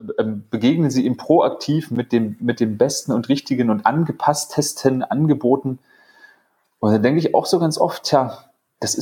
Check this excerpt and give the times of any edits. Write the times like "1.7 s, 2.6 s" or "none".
none

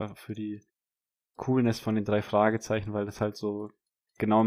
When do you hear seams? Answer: none

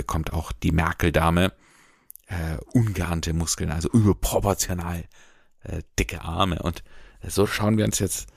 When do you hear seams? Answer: none

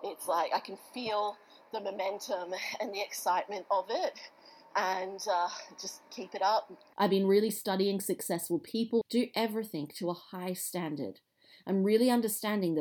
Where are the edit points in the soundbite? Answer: 6.9 s, 9.0 s

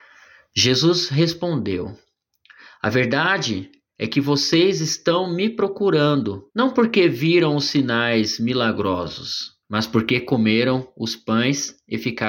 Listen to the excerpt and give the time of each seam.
6.5 s, 9.6 s

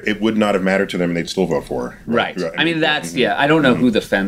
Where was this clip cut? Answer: none

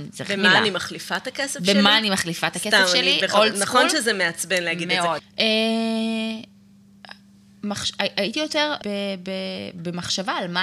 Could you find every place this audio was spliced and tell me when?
5.2 s, 8.8 s

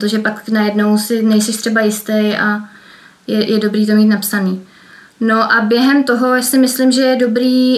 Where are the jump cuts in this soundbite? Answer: none

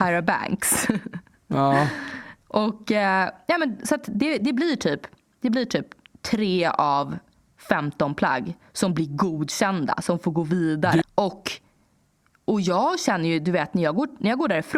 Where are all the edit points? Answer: 11.0 s

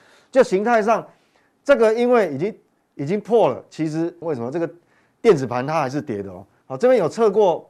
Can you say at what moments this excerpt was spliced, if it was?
4.2 s, 6.6 s

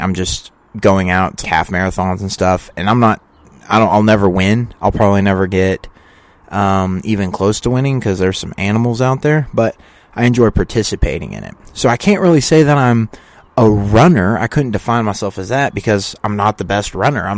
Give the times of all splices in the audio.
1.4 s

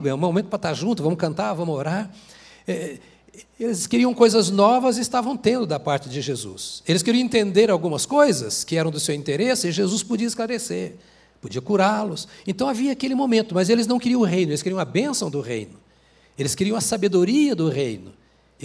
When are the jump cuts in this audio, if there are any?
none

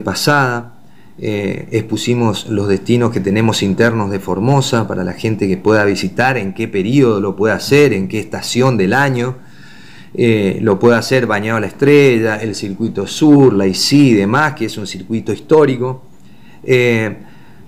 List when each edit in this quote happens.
none

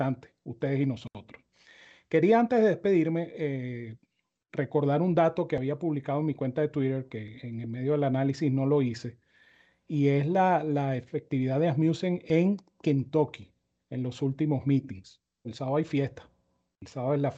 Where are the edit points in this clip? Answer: 4.5 s, 15.4 s

